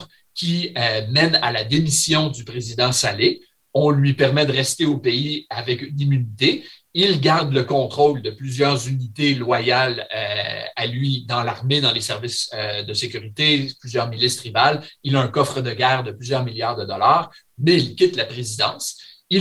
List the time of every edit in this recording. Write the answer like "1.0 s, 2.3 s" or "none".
none